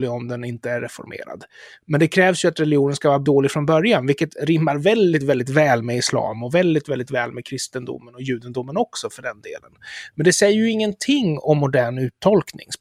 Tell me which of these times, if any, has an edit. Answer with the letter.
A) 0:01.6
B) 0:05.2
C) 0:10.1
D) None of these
D